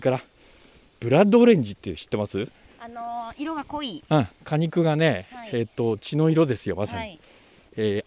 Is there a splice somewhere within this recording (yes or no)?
no